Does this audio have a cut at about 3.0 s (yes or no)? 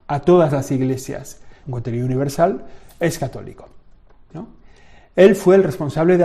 no